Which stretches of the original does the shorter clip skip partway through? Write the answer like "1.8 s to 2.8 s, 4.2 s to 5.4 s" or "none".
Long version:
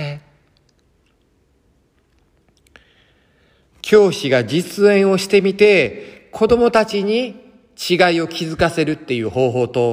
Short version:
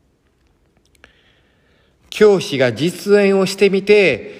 none